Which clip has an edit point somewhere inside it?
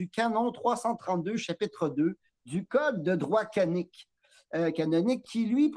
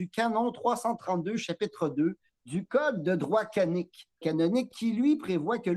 second; 1 cut; at 4.2 s

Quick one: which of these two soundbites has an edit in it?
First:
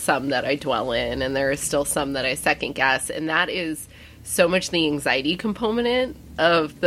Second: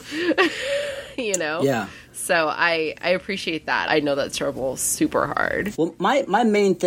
second; 2 cuts; at 3.9 s, 5.7 s

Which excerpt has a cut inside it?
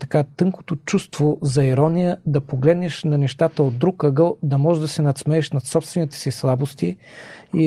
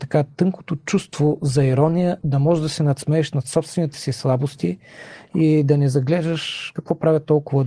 second; 1 cut; at 2.2 s

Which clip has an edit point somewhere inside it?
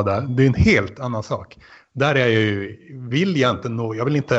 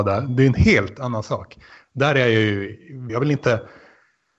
second; 1 cut; at 3.1 s

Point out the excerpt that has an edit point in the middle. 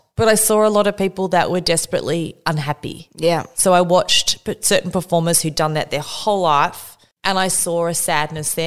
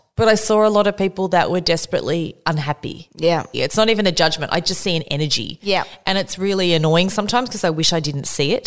second; 1 cut; at 3.5 s

